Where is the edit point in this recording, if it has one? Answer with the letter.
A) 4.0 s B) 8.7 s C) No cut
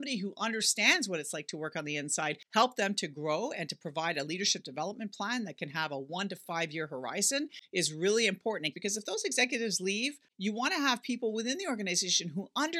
B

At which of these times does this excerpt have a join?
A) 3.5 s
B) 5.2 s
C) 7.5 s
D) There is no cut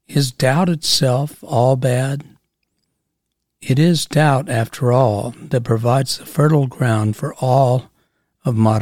D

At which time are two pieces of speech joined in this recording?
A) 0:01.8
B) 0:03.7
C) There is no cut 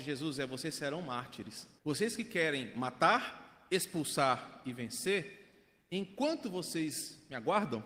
A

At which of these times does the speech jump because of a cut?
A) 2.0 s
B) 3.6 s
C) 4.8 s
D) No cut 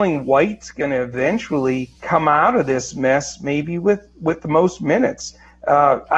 A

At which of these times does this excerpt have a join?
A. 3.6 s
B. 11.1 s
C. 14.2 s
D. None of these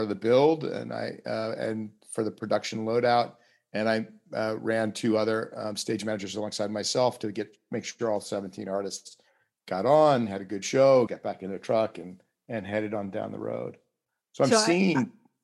B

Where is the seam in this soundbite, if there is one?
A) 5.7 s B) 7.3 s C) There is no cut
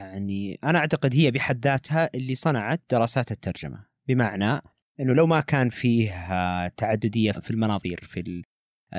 B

